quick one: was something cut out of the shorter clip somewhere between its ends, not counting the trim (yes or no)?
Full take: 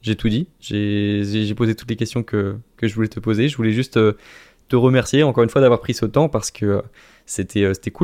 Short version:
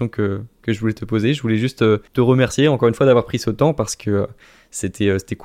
yes